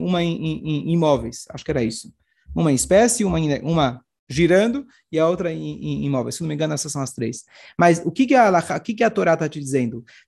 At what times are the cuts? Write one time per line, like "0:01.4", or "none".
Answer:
none